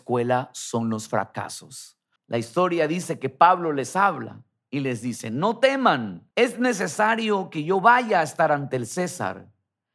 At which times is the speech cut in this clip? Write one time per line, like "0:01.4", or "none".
0:02.2
0:06.3